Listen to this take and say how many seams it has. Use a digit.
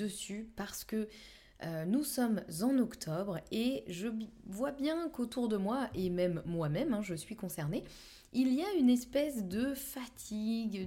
0